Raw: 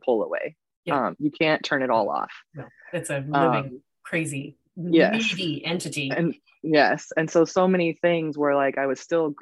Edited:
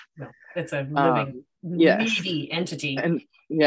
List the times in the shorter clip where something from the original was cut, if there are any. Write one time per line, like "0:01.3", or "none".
0:01.6